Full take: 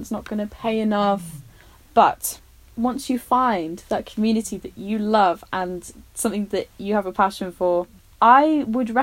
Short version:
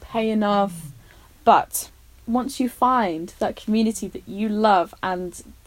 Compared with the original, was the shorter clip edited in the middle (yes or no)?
no